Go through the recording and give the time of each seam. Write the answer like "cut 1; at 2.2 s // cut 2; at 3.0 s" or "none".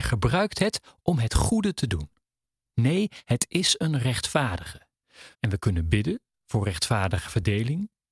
cut 1; at 2.7 s // cut 2; at 5.3 s